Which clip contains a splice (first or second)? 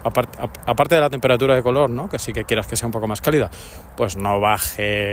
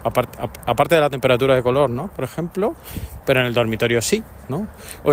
second